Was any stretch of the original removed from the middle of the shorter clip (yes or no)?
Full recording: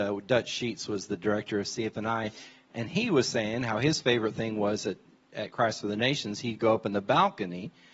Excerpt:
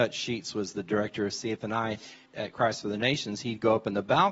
yes